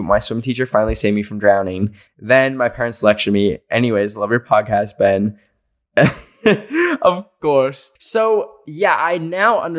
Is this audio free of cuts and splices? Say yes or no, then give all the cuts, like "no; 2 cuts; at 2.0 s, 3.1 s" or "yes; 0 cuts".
no; 1 cut; at 8.0 s